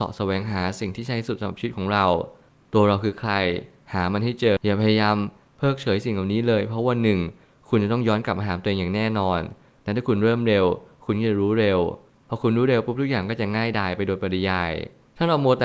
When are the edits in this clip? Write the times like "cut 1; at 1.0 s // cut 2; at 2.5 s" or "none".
cut 1; at 4.6 s